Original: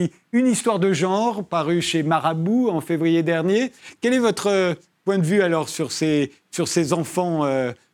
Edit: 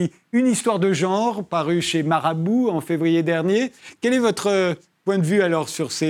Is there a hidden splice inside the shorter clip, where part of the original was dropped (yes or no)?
no